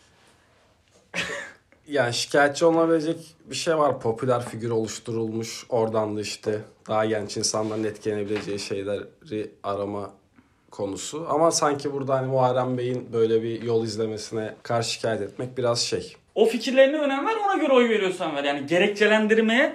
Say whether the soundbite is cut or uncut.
cut